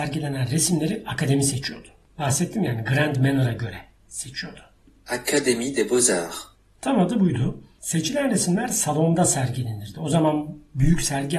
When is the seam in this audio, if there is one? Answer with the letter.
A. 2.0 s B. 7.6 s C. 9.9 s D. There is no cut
D